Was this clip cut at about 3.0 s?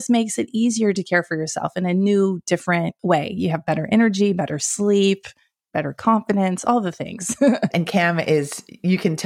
yes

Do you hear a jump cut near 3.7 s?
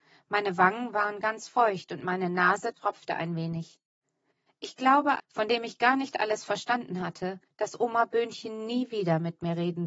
no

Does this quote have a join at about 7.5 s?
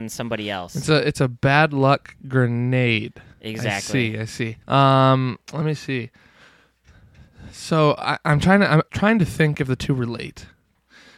no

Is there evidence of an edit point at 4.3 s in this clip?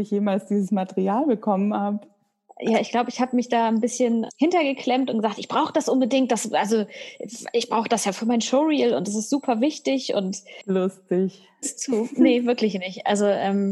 yes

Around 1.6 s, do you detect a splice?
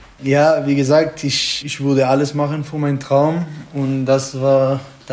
yes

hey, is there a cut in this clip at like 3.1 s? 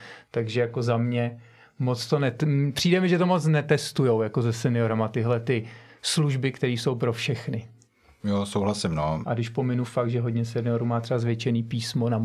no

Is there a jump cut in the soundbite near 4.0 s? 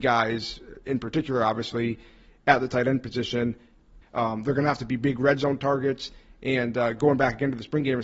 yes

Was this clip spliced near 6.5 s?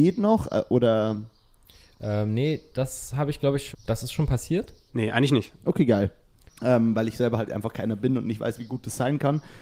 yes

